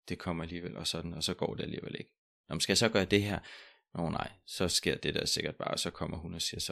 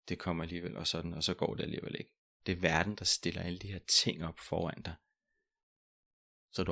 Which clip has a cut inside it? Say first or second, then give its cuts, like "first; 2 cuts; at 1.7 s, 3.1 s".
second; 1 cut; at 2.4 s